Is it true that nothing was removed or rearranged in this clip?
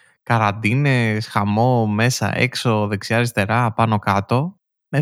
yes; 0 cuts

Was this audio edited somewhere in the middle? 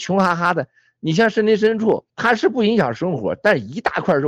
yes; 1 cut; at 2.1 s

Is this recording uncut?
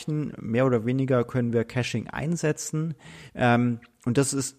no; 1 cut; at 3.3 s

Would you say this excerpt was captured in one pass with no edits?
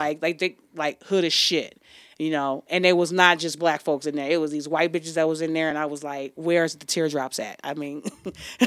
yes; 0 cuts

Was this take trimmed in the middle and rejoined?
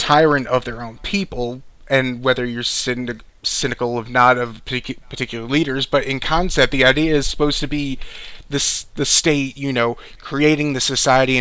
no; 0 cuts

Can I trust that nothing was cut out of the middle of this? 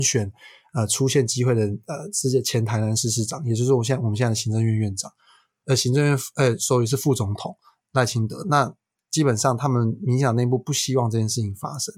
yes; 0 cuts

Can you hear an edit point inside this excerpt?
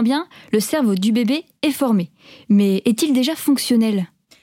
no; 0 cuts

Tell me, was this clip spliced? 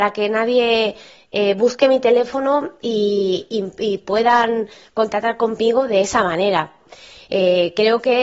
no; 0 cuts

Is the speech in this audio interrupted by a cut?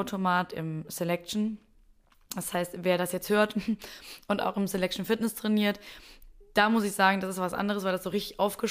no; 0 cuts

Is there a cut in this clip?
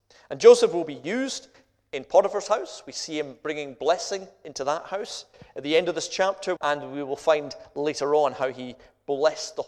yes; 1 cut; at 6.6 s

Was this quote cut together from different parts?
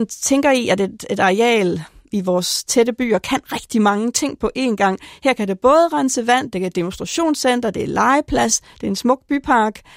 no; 0 cuts

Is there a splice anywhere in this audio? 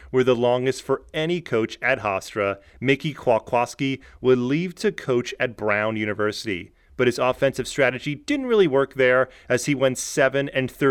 yes; 1 cut; at 2.7 s

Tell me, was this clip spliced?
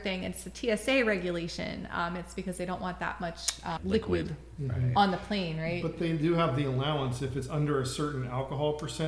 yes; 1 cut; at 3.8 s

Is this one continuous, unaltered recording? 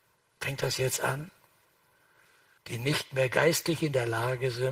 no; 1 cut; at 2.6 s

